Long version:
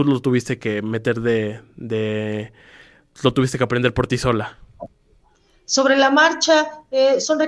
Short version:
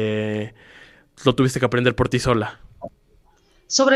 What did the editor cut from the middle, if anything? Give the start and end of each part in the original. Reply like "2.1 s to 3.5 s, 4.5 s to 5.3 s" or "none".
none